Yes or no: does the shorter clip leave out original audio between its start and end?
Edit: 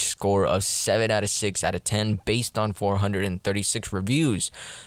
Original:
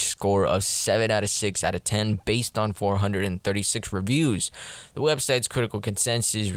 no